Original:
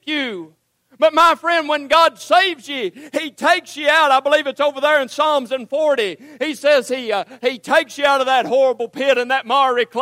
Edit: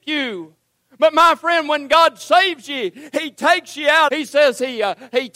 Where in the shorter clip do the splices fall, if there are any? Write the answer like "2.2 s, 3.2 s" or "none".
4.1 s